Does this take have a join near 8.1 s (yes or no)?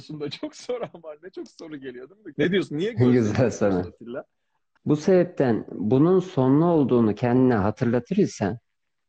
no